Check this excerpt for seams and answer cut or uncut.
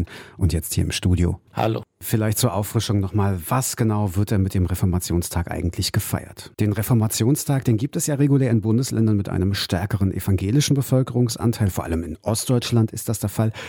cut